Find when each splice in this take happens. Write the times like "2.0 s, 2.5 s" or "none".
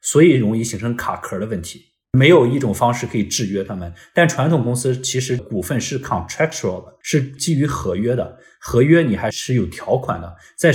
none